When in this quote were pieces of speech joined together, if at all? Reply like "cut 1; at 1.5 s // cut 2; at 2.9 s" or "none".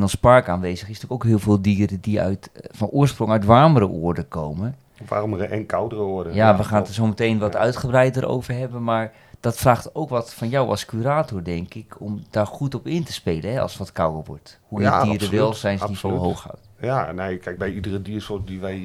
cut 1; at 17.6 s

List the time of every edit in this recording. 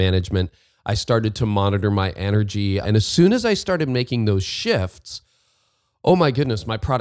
cut 1; at 2.8 s

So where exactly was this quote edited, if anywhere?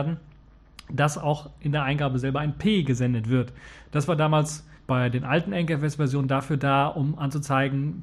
cut 1; at 4.8 s

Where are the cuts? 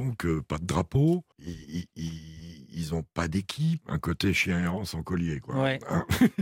cut 1; at 1.3 s // cut 2; at 3.8 s

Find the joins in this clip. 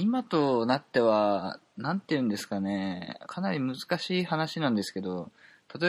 cut 1; at 3.3 s

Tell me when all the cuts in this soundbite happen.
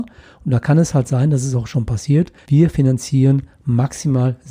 cut 1; at 2.4 s

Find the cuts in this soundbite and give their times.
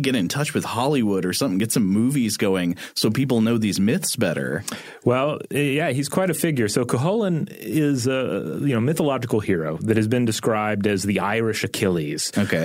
none

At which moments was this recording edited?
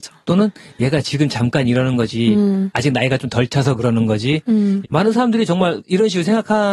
cut 1; at 4.8 s

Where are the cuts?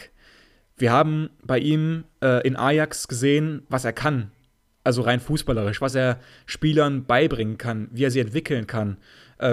none

